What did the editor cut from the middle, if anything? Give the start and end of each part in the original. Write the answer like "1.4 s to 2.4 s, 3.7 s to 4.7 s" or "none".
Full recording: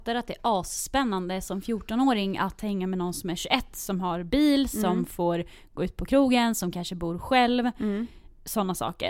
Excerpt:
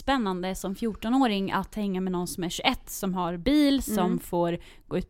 none